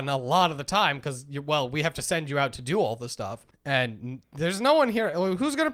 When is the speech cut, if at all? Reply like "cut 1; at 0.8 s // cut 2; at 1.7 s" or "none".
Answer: none